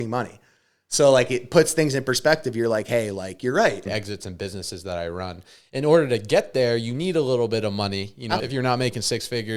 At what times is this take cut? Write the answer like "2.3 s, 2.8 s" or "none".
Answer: 3.9 s, 8.4 s